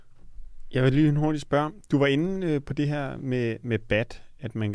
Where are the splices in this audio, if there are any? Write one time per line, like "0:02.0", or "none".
none